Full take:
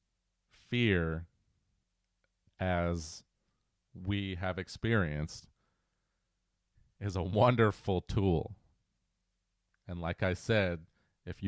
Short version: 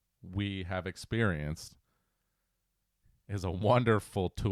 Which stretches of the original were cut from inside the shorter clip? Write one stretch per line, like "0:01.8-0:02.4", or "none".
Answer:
none